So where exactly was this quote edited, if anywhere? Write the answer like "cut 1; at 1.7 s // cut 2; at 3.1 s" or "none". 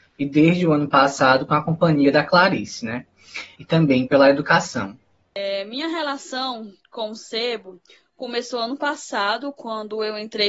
cut 1; at 3.5 s